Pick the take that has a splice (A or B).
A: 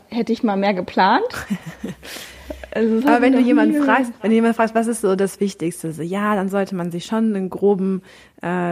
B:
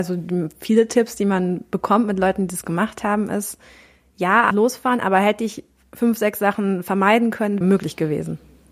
B